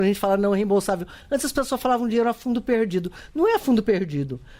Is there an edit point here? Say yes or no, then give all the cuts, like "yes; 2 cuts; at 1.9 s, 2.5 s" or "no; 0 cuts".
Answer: no; 0 cuts